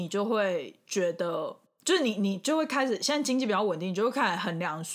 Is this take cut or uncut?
uncut